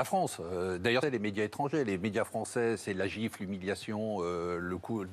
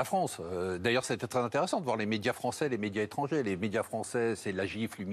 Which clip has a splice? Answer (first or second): first